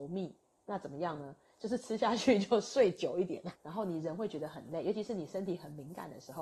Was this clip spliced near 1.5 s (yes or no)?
no